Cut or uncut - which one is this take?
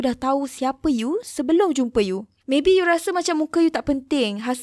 cut